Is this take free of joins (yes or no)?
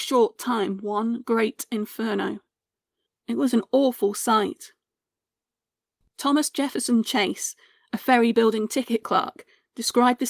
no